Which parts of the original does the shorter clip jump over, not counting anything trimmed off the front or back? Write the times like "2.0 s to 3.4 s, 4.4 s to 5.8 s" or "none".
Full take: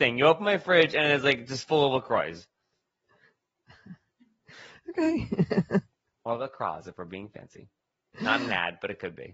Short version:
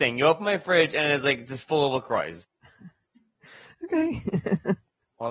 2.4 s to 3.5 s